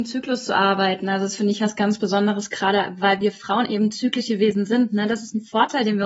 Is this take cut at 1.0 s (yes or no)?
no